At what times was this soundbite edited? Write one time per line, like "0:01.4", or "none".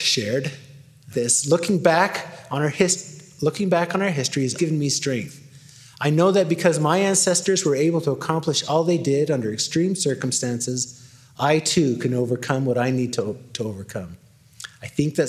0:01.1
0:04.6